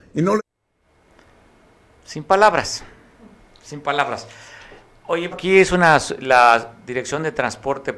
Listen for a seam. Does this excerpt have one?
yes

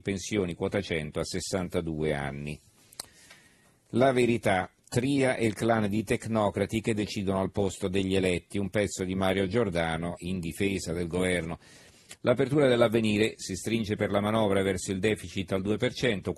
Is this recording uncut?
no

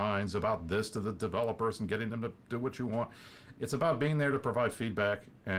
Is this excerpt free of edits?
yes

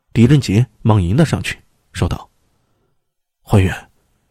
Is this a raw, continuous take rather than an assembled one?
yes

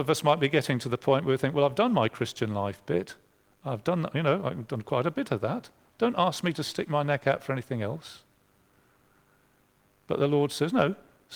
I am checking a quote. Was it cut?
no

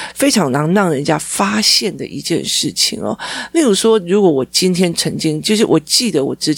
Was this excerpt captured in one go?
yes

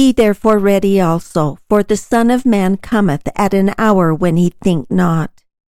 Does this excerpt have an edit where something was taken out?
no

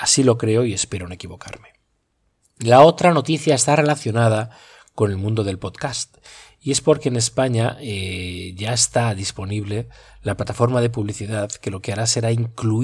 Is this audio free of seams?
yes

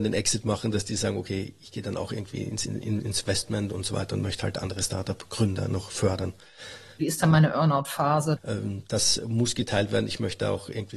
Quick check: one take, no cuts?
no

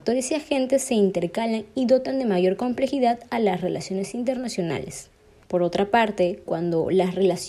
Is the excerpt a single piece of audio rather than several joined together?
no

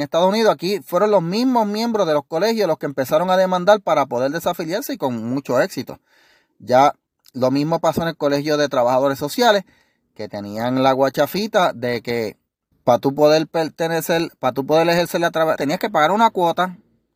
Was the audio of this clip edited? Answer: yes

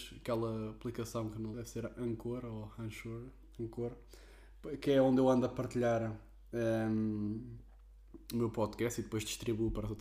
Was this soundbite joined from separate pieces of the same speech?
yes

